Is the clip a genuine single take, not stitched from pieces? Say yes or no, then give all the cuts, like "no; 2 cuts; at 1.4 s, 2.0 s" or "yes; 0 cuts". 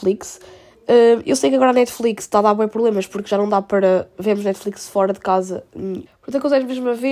no; 1 cut; at 6.1 s